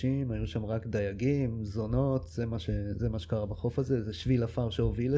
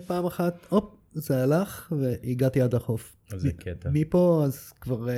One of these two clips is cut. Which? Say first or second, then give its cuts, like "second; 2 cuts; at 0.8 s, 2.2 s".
second; 1 cut; at 3.2 s